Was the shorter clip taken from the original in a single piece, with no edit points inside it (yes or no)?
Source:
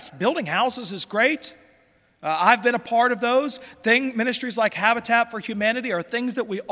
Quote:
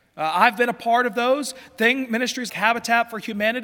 no